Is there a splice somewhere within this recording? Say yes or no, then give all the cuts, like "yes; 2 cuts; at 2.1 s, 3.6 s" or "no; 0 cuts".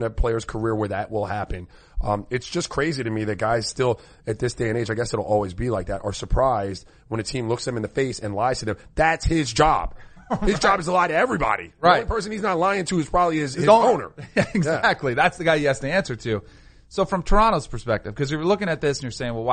no; 0 cuts